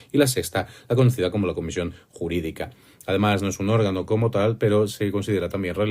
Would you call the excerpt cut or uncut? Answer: uncut